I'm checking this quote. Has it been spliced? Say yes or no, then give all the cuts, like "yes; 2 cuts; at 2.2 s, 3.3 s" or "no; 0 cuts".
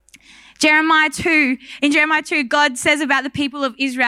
no; 0 cuts